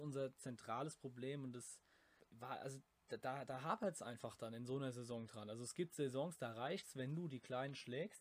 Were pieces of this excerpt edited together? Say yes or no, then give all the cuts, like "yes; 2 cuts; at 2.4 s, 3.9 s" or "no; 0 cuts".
no; 0 cuts